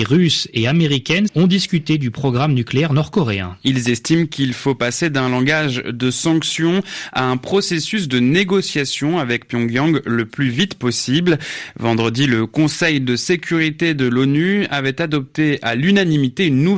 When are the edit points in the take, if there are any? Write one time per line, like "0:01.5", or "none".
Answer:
0:01.3